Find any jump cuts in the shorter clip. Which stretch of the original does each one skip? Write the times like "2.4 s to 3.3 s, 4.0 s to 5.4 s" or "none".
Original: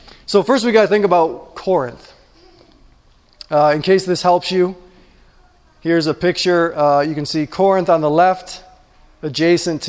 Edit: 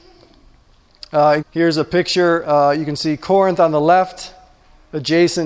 3.8 s to 5.7 s